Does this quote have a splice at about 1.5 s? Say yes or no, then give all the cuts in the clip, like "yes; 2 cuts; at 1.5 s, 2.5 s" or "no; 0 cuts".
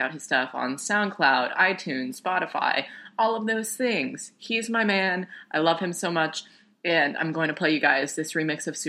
no; 0 cuts